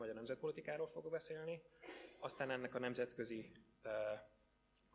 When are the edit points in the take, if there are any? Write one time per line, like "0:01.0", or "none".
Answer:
none